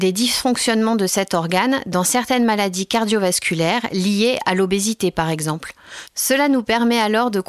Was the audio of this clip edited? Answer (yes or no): no